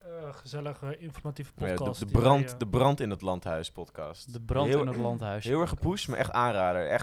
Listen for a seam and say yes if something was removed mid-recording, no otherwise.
no